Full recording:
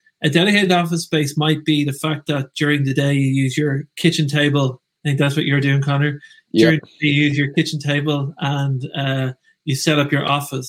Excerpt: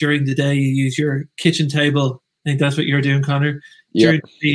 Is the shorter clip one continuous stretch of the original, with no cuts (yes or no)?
yes